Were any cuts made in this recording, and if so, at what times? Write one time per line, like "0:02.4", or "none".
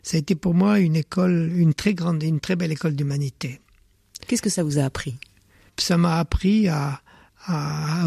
none